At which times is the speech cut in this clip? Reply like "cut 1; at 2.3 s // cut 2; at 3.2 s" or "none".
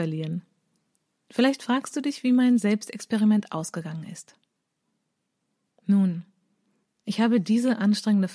none